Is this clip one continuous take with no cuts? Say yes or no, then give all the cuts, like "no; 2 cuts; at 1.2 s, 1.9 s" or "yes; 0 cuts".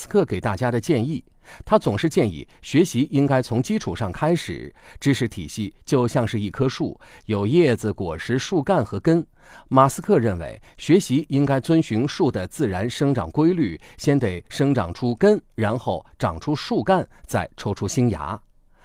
yes; 0 cuts